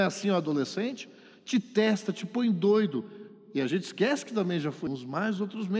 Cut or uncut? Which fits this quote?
cut